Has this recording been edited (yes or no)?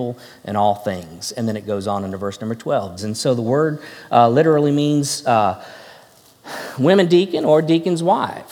yes